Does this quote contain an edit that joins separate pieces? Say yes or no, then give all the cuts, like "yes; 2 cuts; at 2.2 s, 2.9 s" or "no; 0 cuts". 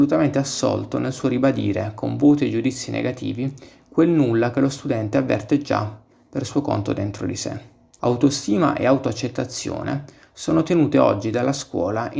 yes; 1 cut; at 8.0 s